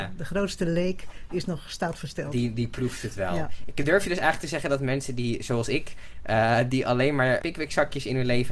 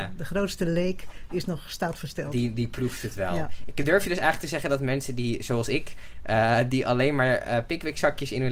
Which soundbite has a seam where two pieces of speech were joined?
first; 1 cut; at 7.4 s

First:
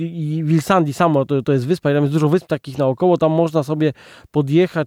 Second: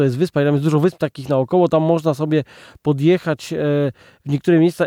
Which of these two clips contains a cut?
first; 1 cut; at 1.4 s

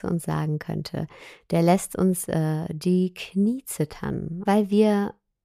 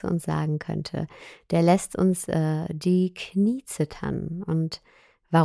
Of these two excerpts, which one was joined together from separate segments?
first; 1 cut; at 4.5 s

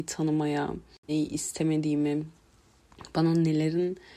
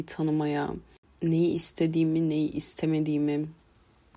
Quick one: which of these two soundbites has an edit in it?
first; 1 cut; at 1.1 s

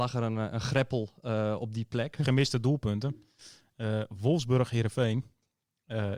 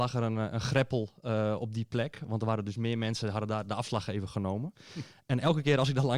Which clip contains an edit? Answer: first; 1 cut; at 2.2 s

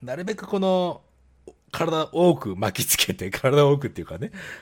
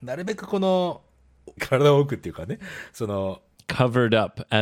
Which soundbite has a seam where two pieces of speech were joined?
second; 1 cut; at 1.6 s

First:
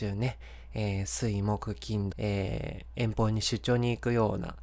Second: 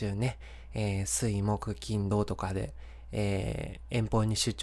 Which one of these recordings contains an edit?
first; 1 cut; at 2.1 s

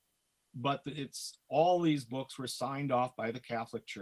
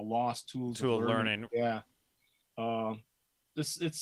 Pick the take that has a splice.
second; 1 cut; at 1.4 s

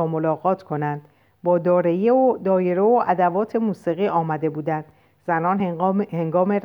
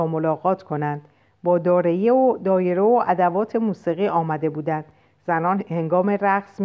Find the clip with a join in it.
second; 1 cut; at 5.6 s

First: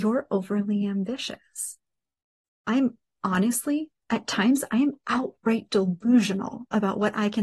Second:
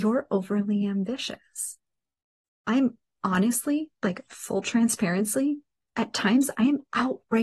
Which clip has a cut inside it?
first; 1 cut; at 3.9 s

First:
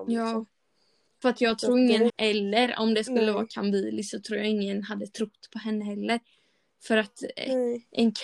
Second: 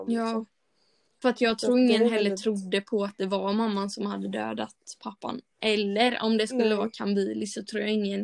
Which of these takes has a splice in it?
first; 1 cut; at 2.1 s

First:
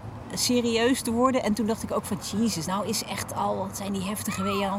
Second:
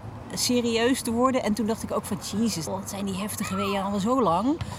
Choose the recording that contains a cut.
second; 1 cut; at 2.7 s

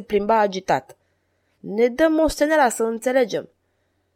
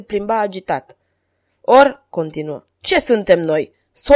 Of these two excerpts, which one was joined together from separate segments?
first; 1 cut; at 1.6 s

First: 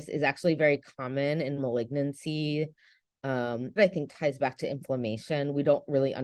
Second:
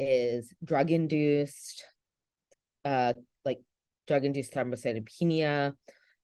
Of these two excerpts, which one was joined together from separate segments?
first; 1 cut; at 3.8 s

